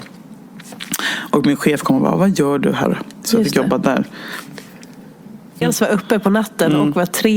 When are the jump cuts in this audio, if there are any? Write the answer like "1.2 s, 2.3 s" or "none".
2.8 s, 5.6 s